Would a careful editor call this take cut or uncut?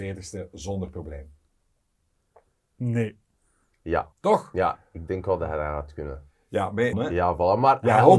cut